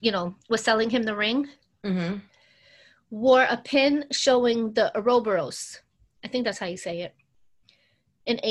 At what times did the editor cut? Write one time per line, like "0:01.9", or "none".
none